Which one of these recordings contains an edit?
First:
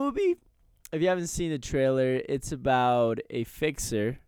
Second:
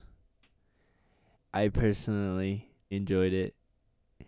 second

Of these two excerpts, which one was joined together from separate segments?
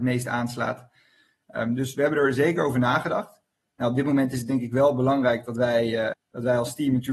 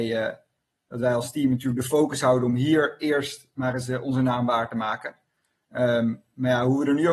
first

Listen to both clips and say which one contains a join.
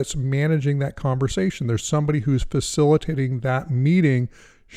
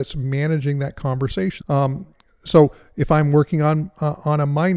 second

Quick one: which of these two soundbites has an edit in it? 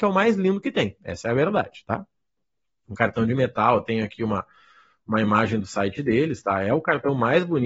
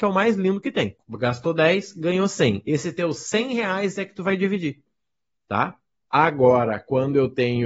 second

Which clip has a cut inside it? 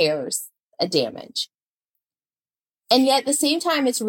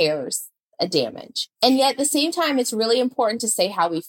second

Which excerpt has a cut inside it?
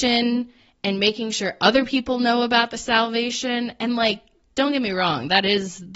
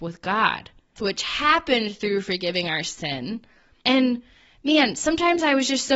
second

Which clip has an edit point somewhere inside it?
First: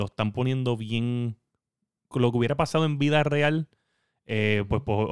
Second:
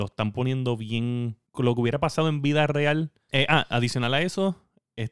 second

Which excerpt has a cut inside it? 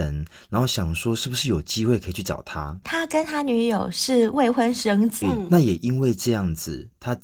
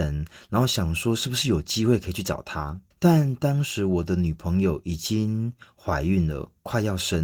first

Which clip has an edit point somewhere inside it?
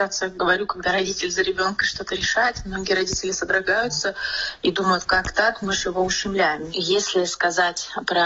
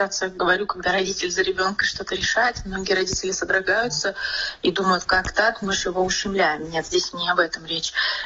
first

